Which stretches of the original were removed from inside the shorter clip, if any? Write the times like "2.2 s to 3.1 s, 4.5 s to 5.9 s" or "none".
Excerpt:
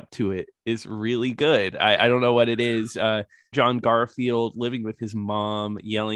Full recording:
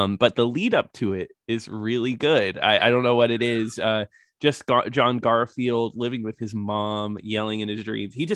4.3 s to 4.9 s